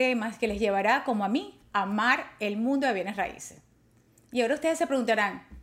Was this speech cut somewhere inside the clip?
no; 0 cuts

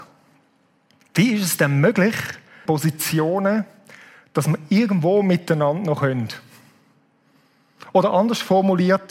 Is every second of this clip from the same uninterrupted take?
no; 1 cut; at 2.7 s

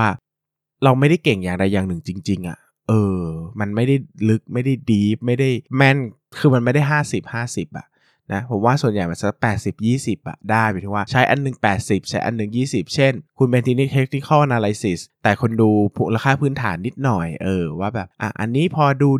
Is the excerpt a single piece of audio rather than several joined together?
no; 1 cut; at 5.7 s

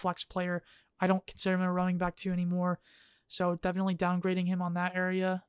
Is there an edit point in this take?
no; 0 cuts

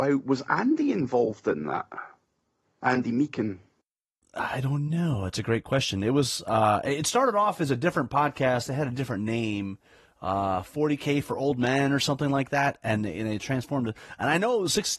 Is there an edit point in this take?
no; 0 cuts

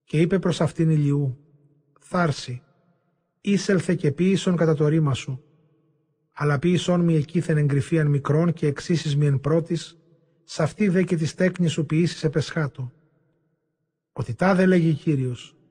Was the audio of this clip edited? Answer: no; 0 cuts

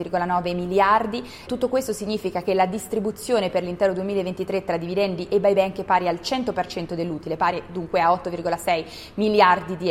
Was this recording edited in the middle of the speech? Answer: yes; 1 cut; at 1.5 s

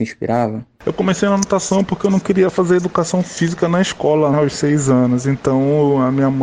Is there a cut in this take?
yes; 1 cut; at 4.3 s

